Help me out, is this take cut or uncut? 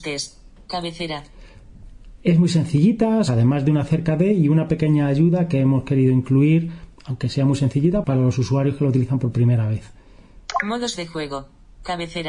cut